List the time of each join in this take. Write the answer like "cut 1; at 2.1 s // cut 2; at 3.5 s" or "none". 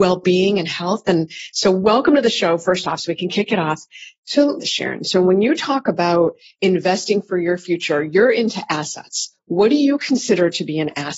cut 1; at 4.6 s